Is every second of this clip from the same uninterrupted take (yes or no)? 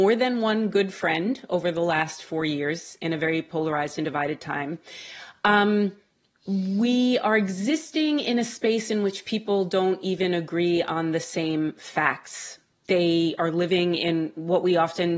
yes